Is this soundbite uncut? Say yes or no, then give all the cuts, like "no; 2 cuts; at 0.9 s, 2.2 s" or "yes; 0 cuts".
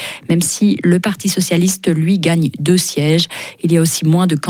yes; 0 cuts